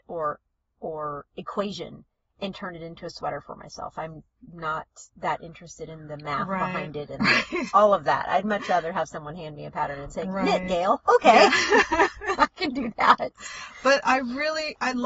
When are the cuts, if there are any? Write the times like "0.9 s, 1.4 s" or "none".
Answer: none